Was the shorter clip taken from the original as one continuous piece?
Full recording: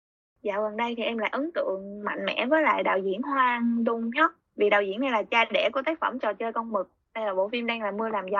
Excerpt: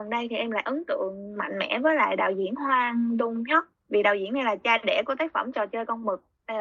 yes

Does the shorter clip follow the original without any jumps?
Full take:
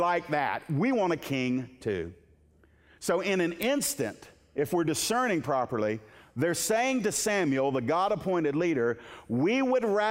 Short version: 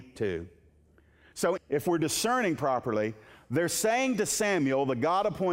no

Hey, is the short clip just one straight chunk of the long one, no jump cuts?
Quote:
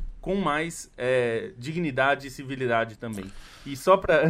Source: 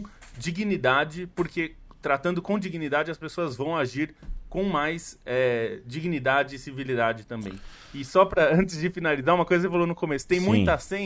yes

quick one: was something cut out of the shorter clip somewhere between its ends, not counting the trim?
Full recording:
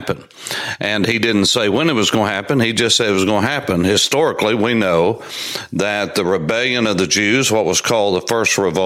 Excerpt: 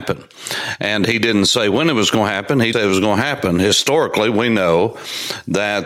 yes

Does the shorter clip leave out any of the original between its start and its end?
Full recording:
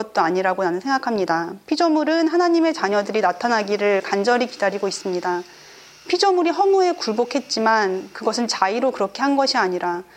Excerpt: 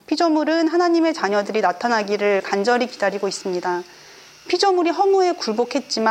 no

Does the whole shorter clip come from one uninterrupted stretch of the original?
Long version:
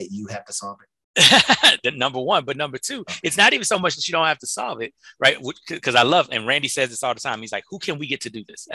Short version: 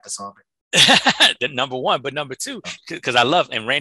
no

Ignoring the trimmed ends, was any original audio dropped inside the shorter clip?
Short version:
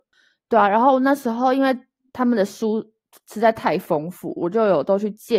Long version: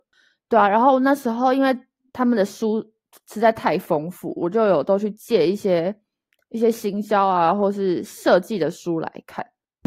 no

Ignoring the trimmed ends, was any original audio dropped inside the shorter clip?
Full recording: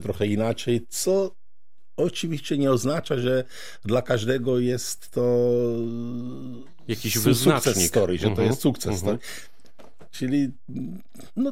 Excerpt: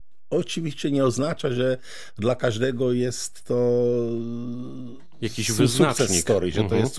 no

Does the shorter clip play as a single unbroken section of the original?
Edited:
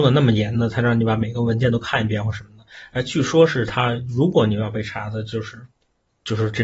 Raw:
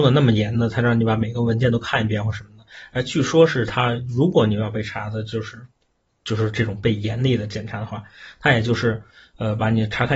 yes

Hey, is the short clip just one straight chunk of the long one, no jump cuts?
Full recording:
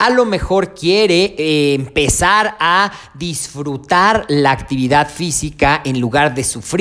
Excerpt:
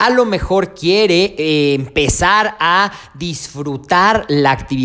yes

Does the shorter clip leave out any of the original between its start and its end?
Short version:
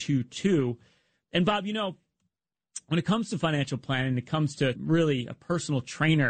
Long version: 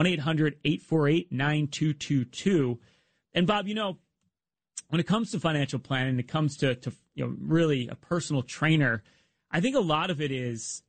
yes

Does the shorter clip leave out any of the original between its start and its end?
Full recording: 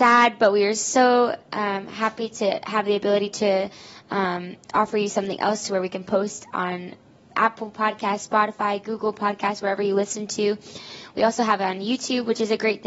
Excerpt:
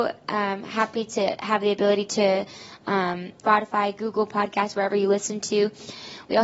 yes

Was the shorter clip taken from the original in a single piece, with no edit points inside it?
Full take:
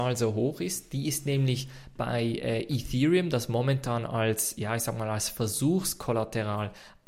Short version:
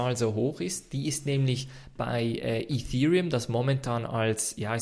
yes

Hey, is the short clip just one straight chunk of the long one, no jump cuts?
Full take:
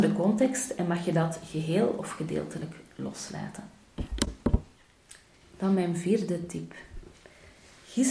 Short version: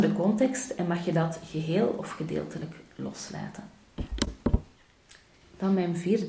yes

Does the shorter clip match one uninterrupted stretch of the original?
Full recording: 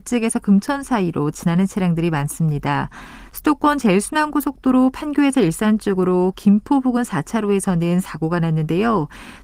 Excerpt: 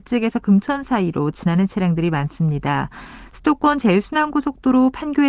yes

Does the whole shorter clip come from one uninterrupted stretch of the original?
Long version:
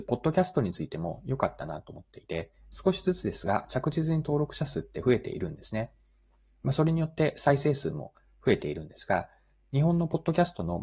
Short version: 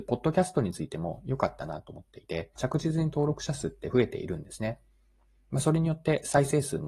no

